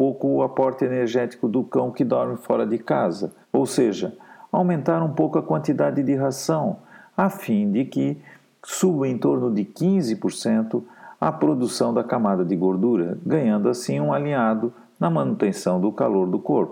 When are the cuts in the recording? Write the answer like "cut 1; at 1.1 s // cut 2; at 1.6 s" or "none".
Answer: cut 1; at 3.4 s